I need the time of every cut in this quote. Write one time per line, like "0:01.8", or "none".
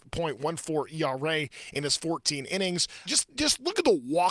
0:03.1